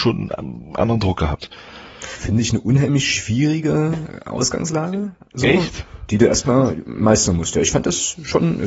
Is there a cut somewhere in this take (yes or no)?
yes